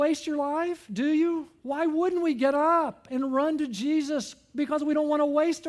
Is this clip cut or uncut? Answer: cut